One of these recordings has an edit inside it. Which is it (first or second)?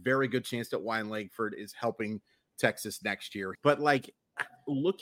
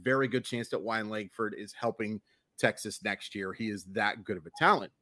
first